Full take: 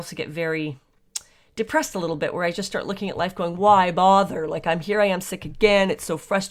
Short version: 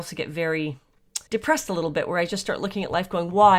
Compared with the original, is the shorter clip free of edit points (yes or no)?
no